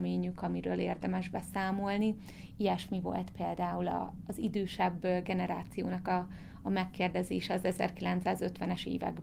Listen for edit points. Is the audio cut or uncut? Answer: uncut